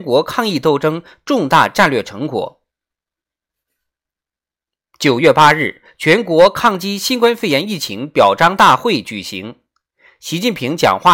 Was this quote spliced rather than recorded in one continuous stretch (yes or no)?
no